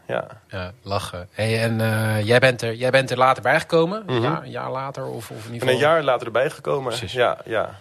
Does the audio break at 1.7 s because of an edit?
no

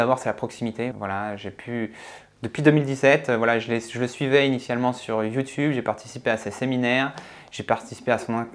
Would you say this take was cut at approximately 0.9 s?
yes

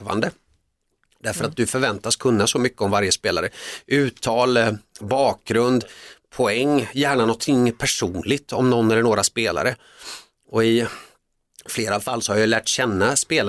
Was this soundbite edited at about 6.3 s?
no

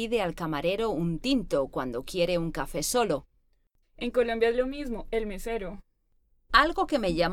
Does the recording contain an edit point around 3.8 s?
yes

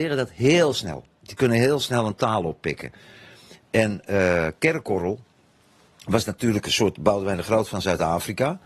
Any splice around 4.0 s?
no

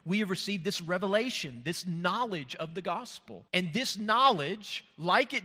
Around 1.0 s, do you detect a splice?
no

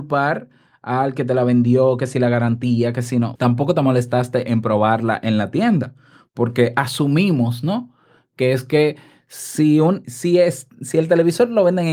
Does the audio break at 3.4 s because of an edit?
yes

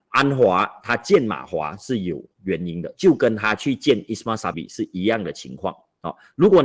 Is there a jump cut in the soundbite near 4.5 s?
yes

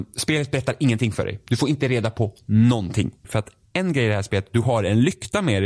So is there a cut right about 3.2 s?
yes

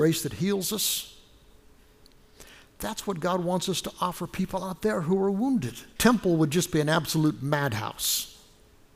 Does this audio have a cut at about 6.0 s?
yes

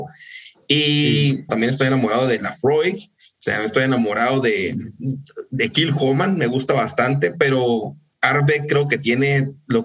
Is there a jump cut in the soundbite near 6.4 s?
no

